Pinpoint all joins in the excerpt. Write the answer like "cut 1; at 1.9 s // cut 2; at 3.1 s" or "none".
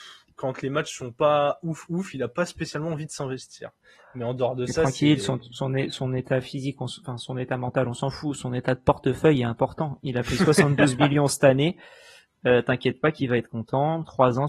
none

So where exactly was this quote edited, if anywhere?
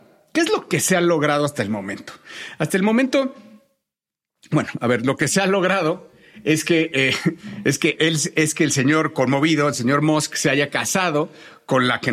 none

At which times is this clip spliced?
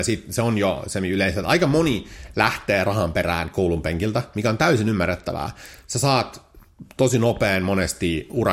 none

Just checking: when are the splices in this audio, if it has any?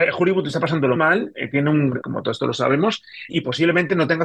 cut 1; at 1.0 s // cut 2; at 2.0 s // cut 3; at 3.3 s

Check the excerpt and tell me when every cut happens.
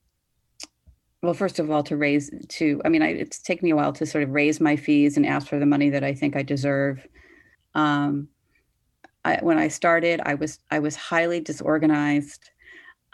cut 1; at 7.5 s

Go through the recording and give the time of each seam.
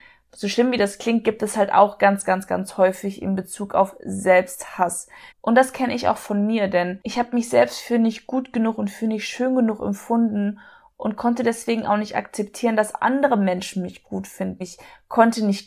cut 1; at 5.3 s // cut 2; at 14.6 s

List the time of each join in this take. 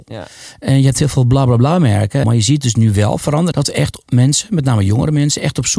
cut 1; at 2.2 s // cut 2; at 3.5 s

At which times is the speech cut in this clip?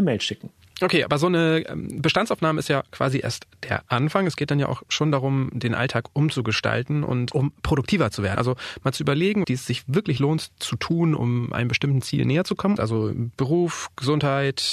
cut 1; at 8.4 s // cut 2; at 9.4 s // cut 3; at 12.8 s

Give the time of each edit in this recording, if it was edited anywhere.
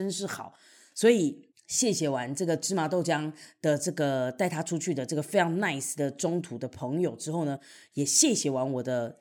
none

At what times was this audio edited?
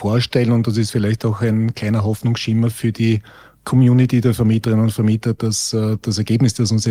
none

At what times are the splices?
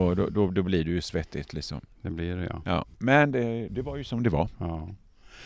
cut 1; at 3.7 s

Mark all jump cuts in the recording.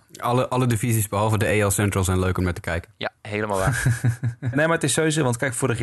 cut 1; at 3.2 s // cut 2; at 4.5 s

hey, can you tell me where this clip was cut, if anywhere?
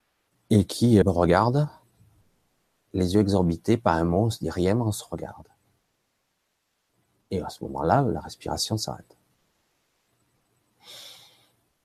cut 1; at 1.0 s

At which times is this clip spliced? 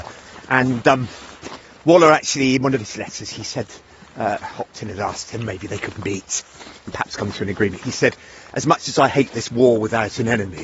cut 1; at 4.4 s

